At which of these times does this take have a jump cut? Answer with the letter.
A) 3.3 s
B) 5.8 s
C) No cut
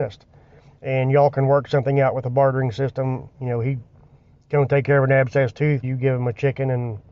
B